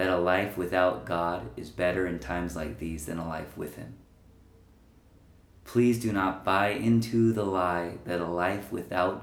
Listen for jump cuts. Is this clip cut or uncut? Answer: uncut